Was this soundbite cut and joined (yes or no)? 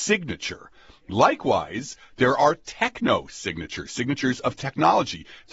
no